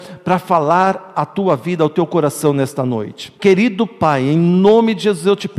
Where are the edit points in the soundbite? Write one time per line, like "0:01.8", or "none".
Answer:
0:03.4